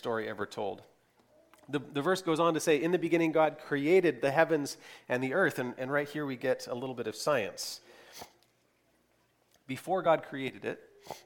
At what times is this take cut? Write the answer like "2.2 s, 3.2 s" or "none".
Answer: none